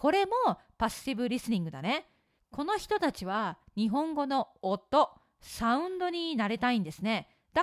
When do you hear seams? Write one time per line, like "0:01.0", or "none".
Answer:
0:02.4